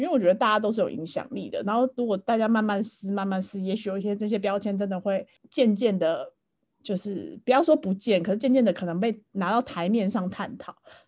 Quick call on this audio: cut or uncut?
cut